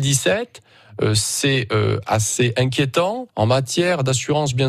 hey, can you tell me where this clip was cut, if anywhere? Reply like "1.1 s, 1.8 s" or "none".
3.3 s

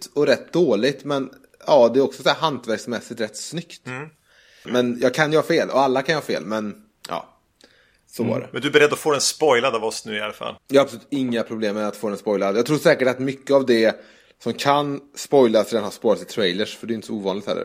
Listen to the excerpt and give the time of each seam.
4.7 s, 10.6 s

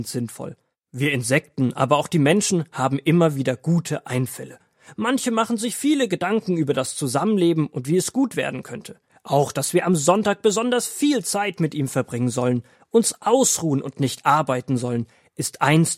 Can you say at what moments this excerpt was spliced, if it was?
9.1 s

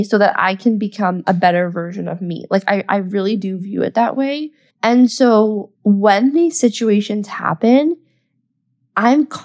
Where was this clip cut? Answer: 4.7 s, 5.7 s

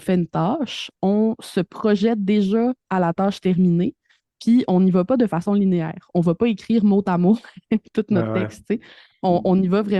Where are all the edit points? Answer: none

